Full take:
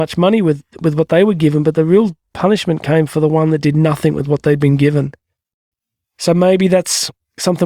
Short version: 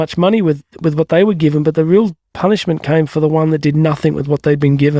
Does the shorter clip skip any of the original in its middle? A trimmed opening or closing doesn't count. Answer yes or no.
no